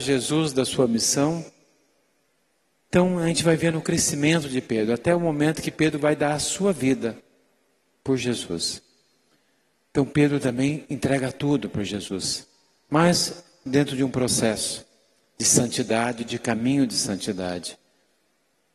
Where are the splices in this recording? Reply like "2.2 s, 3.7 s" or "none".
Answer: 2.8 s